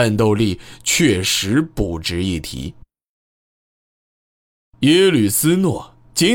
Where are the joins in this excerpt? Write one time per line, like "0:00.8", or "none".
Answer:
none